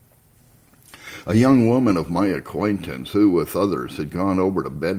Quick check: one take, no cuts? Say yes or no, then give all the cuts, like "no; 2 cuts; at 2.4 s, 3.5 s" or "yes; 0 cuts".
yes; 0 cuts